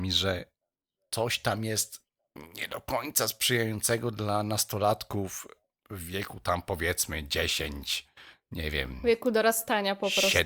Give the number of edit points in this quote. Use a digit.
0